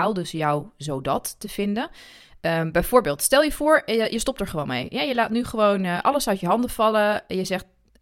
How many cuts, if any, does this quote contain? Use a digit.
0